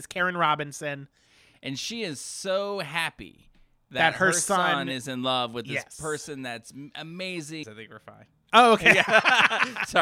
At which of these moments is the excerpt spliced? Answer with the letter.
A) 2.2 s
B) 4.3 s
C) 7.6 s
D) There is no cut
C